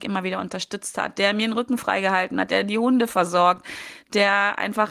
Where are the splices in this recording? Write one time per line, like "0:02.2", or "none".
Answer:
0:02.5